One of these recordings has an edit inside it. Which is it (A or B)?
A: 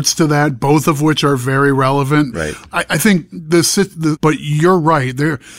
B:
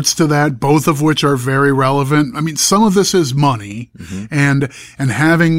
A